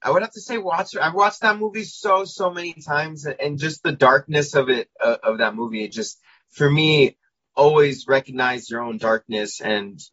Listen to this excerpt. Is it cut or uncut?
uncut